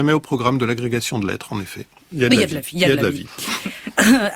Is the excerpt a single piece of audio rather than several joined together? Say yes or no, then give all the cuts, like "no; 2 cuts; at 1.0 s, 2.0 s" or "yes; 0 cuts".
no; 1 cut; at 2.0 s